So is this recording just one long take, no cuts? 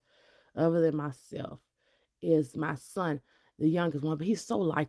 yes; 0 cuts

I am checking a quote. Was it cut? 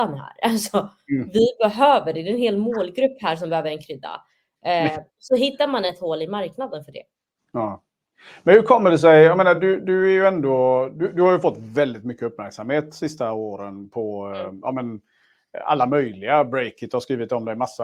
no; 0 cuts

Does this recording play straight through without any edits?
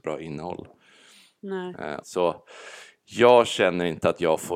no; 1 cut; at 2.0 s

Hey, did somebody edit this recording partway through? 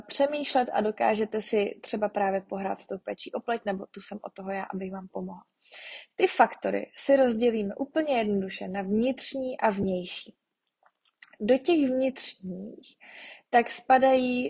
no; 0 cuts

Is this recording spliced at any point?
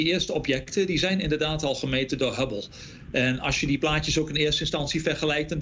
no; 0 cuts

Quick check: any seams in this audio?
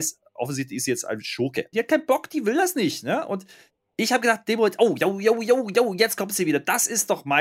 yes; 1 cut; at 1.7 s

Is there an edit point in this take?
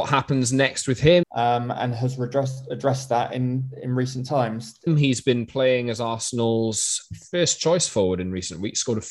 yes; 2 cuts; at 1.2 s, 4.9 s

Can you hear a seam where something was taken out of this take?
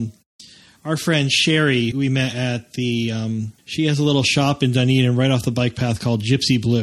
yes; 2 cuts; at 1.9 s, 3.6 s

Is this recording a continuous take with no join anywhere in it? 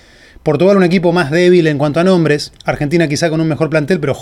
no; 1 cut; at 2.6 s

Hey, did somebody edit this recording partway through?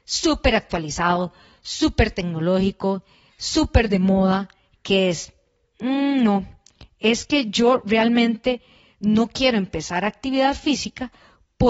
no; 0 cuts

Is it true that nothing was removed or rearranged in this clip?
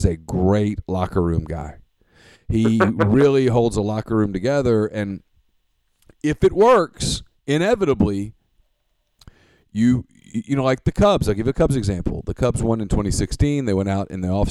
yes; 0 cuts

